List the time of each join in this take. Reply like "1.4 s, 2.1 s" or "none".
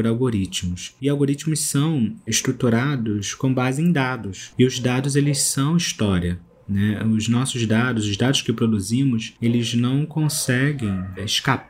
none